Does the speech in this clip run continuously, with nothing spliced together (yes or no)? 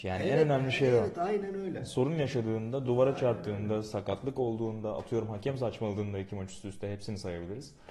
yes